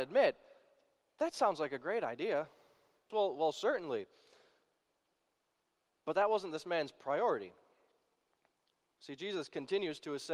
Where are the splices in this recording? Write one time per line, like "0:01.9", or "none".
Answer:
0:03.1